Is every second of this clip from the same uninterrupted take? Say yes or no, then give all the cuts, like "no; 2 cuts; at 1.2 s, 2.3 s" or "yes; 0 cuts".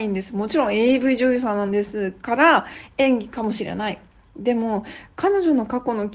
yes; 0 cuts